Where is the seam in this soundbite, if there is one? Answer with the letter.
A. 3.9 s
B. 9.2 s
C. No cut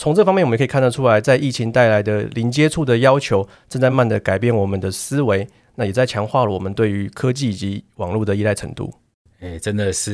A